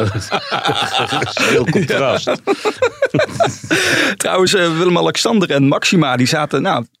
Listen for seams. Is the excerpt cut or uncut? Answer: uncut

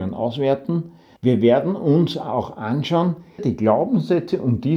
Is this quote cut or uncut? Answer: cut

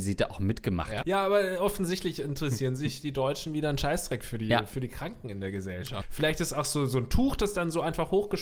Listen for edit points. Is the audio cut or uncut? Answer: cut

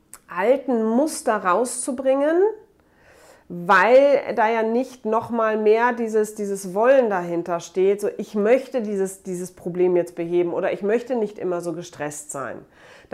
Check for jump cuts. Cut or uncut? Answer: uncut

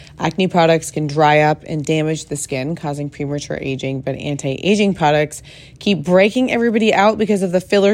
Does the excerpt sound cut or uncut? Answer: uncut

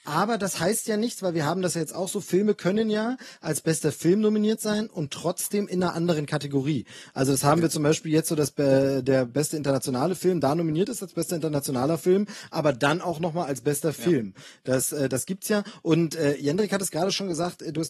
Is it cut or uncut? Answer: uncut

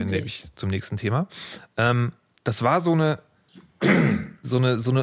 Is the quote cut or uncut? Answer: uncut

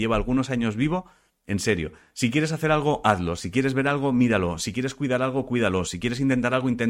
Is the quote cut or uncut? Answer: cut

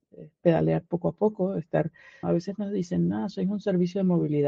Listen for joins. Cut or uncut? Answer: cut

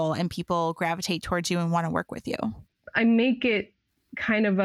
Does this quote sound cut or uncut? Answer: uncut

